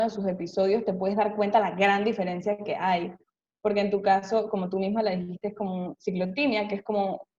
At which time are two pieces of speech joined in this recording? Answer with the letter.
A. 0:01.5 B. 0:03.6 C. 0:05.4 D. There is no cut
D